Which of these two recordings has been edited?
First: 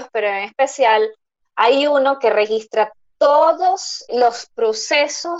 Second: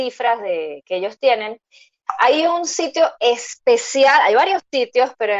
first; 1 cut; at 4.1 s

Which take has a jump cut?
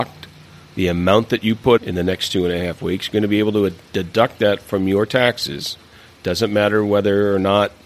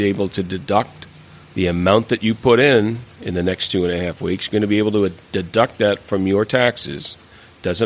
first; 1 cut; at 1.8 s

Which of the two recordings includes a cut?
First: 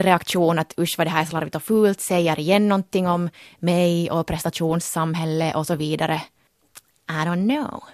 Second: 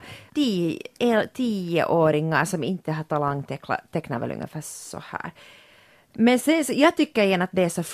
second; 1 cut; at 6.4 s

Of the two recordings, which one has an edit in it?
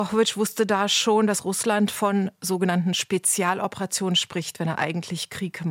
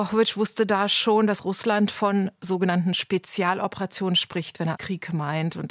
second; 1 cut; at 4.8 s

